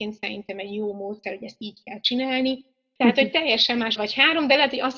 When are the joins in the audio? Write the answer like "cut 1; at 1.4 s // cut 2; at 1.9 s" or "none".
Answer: cut 1; at 3.0 s // cut 2; at 4.0 s